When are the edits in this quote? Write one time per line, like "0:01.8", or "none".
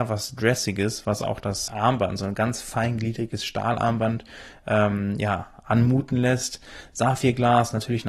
0:01.7